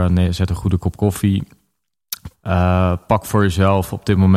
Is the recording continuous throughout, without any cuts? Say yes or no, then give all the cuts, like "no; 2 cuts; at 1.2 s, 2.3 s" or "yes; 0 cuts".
no; 1 cut; at 2.3 s